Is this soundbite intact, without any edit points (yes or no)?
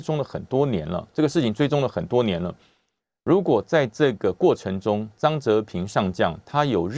yes